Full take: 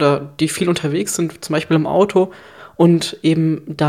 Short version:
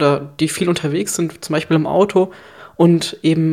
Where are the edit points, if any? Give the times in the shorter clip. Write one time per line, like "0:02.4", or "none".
none